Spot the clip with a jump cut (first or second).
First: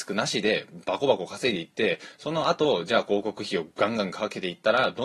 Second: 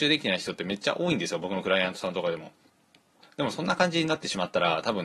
second